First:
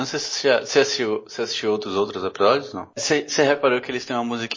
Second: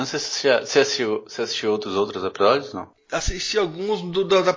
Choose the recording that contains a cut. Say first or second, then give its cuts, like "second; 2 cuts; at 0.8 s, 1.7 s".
first; 1 cut; at 3.0 s